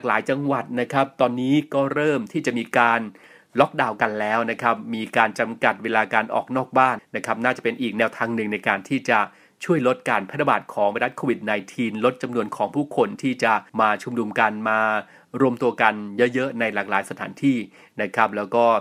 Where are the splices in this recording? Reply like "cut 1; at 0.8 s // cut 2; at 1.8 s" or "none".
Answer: cut 1; at 7.0 s // cut 2; at 13.7 s

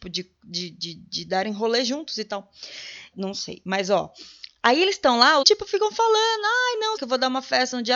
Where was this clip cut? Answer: cut 1; at 3.1 s // cut 2; at 5.4 s // cut 3; at 7.0 s

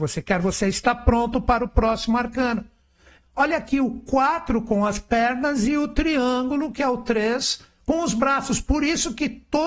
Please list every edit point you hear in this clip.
cut 1; at 3.2 s

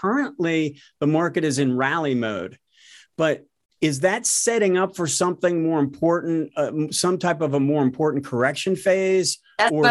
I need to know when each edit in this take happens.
none

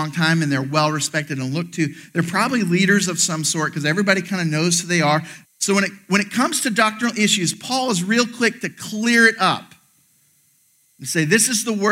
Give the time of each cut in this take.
cut 1; at 5.4 s

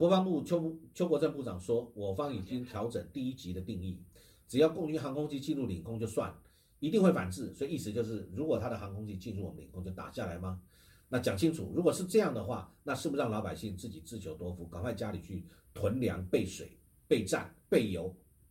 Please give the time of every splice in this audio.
none

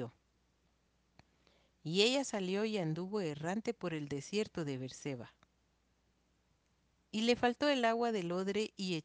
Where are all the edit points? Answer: none

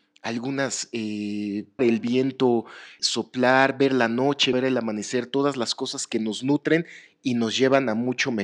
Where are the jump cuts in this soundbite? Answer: cut 1; at 1.8 s // cut 2; at 3.0 s // cut 3; at 4.5 s

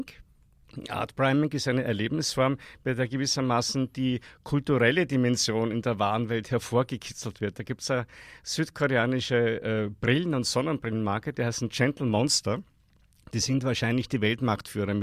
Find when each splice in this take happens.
none

